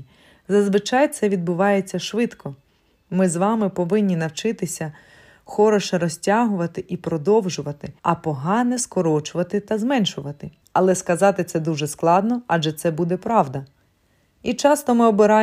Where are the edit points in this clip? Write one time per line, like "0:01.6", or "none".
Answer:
0:08.0
0:10.6